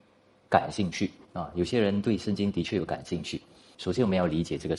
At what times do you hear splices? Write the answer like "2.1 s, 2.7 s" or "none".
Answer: 3.7 s